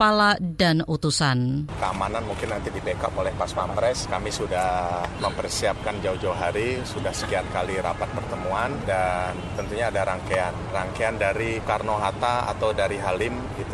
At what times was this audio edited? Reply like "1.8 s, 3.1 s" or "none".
1.7 s